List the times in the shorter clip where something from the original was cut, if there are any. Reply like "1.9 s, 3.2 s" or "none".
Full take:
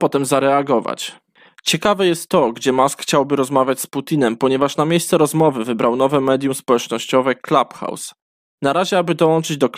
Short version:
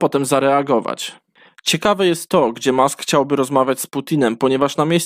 none